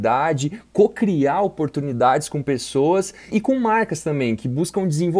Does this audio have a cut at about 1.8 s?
no; 1 cut; at 3.3 s

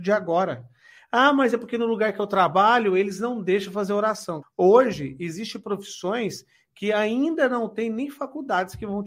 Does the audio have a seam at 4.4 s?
yes; 1 cut; at 4.4 s

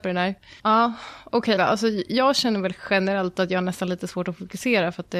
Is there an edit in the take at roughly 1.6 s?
yes; 1 cut; at 1.6 s

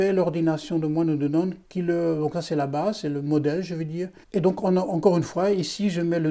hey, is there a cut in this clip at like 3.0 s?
no; 2 cuts; at 1.6 s, 4.2 s

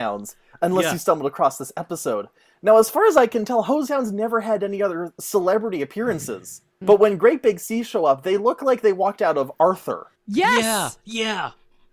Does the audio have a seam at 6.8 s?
yes; 2 cuts; at 6.8 s, 10.2 s

